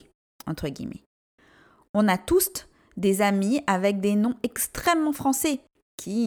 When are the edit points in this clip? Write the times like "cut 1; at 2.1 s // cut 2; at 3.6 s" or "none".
none